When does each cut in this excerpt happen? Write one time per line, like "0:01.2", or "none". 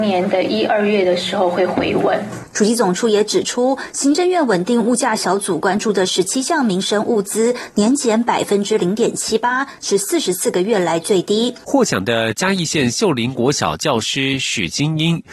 0:11.6

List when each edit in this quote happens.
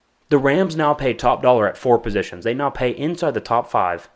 none

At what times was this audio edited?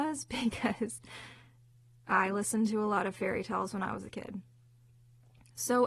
none

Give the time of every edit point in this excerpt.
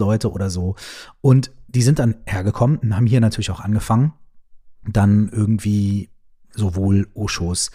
none

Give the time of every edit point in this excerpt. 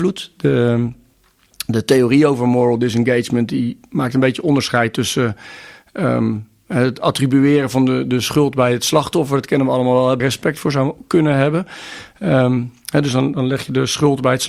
0:10.2

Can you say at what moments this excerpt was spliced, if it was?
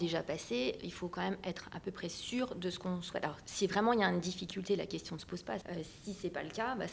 0:05.6

